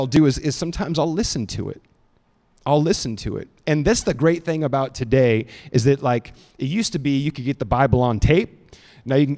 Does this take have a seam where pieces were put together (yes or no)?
no